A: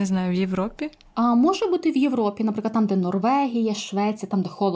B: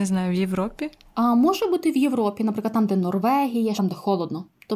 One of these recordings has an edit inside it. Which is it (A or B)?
B